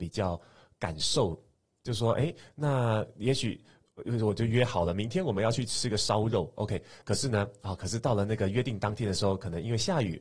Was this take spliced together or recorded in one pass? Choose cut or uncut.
uncut